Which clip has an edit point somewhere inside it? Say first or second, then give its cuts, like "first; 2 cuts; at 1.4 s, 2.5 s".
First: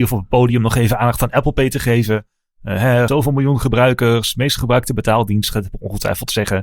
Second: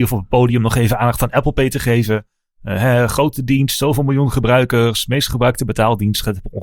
first; 1 cut; at 3.1 s